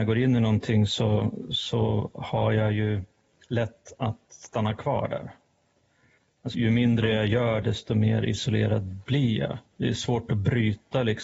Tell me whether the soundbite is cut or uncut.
cut